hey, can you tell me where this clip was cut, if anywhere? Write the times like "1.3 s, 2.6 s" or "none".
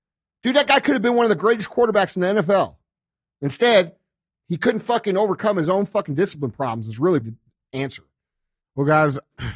7.2 s